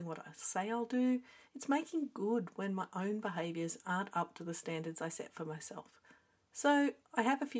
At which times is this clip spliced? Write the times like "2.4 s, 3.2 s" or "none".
1.5 s